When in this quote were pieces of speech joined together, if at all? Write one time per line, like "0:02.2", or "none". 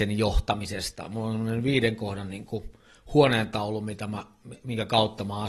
none

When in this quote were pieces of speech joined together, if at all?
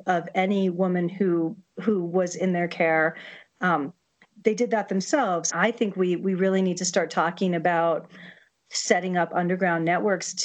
0:04.3
0:05.5

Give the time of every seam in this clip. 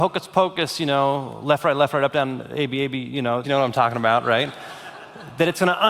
0:03.4

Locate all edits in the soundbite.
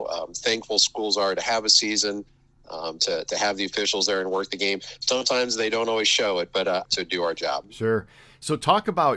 0:06.8

